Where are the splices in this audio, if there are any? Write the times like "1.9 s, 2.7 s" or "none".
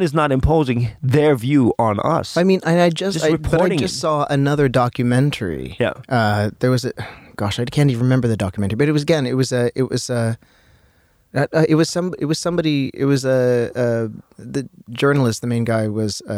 11.3 s